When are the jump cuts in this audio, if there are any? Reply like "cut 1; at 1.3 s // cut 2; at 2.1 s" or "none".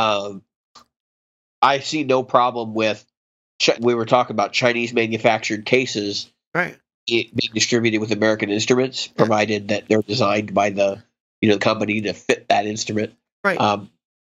cut 1; at 3.8 s